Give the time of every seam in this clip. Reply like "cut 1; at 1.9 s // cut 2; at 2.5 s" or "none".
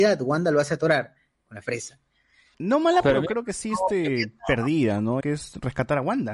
cut 1; at 2.5 s // cut 2; at 5.2 s